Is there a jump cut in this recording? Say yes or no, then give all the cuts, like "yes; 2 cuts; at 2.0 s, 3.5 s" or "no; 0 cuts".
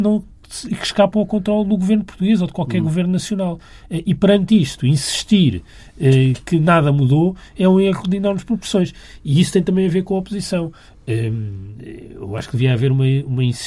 no; 0 cuts